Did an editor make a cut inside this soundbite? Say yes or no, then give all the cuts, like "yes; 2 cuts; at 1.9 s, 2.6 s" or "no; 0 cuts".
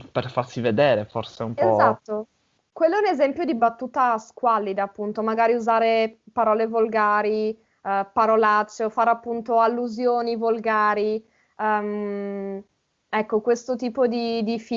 no; 0 cuts